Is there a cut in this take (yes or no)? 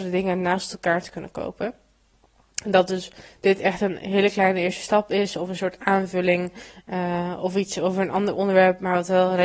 no